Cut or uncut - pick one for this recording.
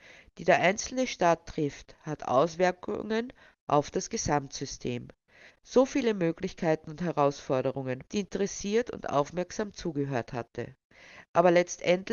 cut